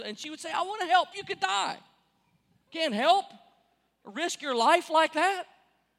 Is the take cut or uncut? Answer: cut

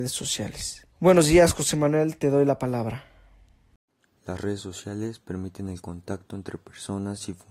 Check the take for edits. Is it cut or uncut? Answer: cut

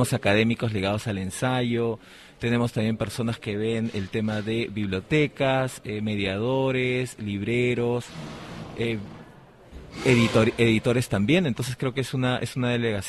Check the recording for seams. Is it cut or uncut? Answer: uncut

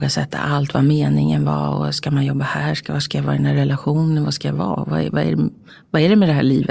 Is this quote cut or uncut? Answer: uncut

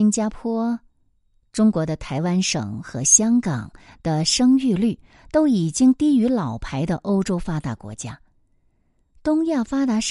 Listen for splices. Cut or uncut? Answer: uncut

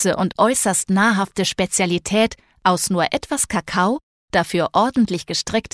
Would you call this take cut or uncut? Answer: uncut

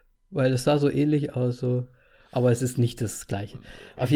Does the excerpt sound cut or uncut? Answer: uncut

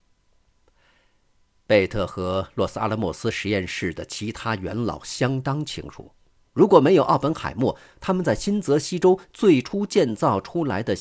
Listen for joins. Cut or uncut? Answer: uncut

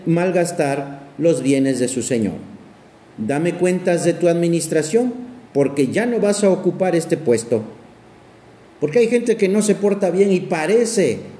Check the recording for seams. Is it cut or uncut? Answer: cut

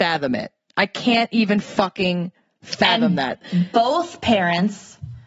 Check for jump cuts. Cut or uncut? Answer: uncut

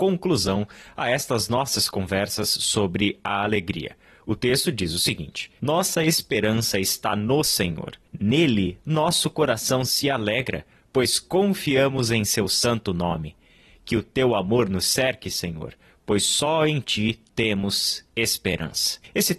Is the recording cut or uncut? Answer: cut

